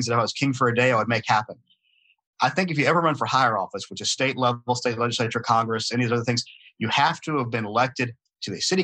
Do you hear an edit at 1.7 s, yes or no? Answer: no